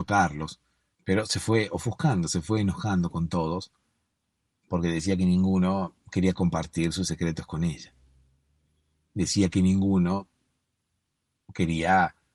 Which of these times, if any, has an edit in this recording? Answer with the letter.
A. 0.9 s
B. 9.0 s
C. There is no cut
A